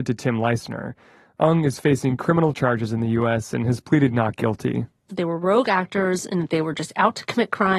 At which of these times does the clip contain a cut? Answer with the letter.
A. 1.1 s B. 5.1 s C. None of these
B